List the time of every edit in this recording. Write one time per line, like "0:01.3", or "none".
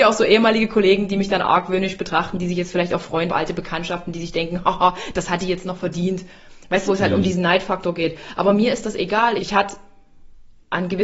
0:03.3
0:06.9
0:09.4